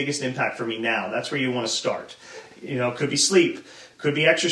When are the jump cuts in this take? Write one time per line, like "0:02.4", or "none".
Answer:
none